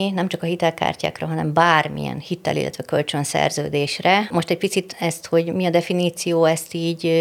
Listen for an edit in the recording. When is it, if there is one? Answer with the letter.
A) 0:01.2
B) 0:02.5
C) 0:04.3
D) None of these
C